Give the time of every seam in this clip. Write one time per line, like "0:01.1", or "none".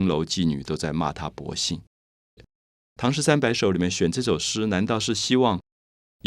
0:02.4